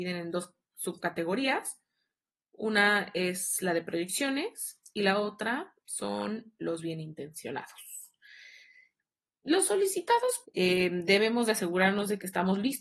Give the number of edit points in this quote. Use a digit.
1